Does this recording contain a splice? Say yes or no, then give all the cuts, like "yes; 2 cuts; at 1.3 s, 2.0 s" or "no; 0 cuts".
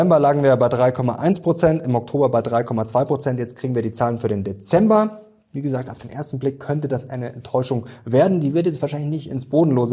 no; 0 cuts